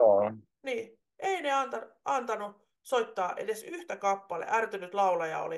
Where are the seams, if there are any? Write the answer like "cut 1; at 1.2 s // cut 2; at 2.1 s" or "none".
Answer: none